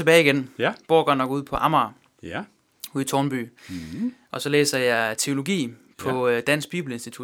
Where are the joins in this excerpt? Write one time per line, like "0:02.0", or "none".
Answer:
none